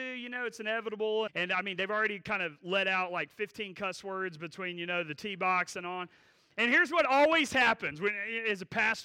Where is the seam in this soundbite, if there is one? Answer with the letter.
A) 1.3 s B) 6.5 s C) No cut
A